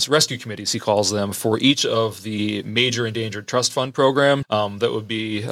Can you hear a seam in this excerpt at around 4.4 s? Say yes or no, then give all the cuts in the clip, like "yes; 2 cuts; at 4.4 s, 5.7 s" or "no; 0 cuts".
yes; 1 cut; at 4.4 s